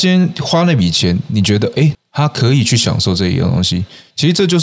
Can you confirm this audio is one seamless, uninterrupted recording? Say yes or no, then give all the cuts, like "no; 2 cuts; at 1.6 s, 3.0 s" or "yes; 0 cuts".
no; 1 cut; at 1.9 s